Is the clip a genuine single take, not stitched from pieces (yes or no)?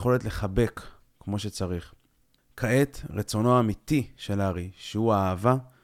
yes